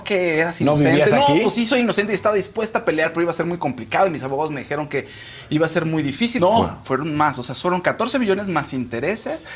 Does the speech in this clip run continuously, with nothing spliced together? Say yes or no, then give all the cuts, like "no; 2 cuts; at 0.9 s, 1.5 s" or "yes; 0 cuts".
no; 1 cut; at 6.4 s